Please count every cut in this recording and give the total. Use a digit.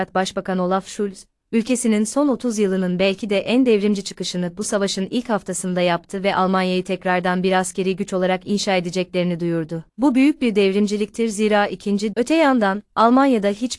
1